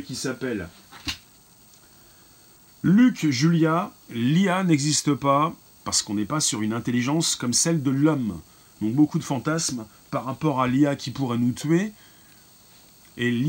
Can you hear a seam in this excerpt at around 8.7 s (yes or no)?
no